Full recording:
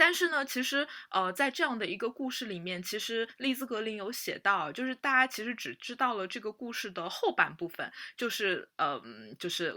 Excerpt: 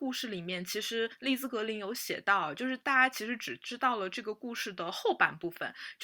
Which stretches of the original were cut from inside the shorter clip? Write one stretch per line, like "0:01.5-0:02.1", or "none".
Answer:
none